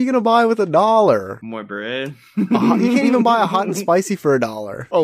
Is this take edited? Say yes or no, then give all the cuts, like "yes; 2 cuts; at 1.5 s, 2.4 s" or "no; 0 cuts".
no; 0 cuts